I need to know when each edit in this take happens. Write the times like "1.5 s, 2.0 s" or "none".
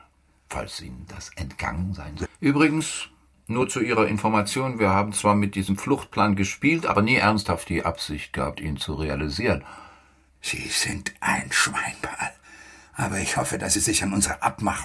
2.2 s, 10.3 s